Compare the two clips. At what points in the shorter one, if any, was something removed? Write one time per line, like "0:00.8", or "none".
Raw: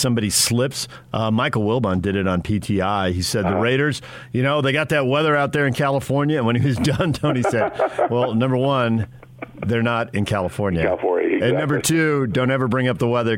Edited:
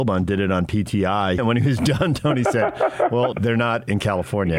0:01.4
0:03.3

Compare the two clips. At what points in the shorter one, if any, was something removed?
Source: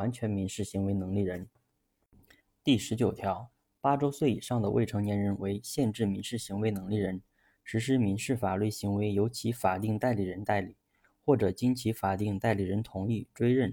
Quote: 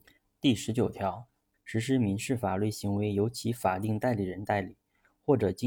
0:01.5

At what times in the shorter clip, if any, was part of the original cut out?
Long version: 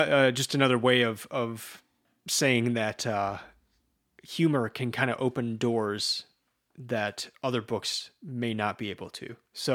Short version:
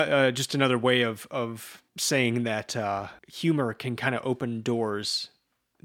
0:01.9
0:03.2

